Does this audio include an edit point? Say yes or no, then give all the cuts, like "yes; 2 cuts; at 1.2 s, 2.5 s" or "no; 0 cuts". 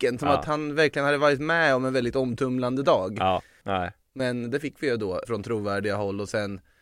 yes; 2 cuts; at 3.6 s, 5.2 s